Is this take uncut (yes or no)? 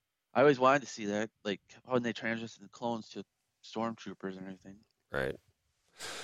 yes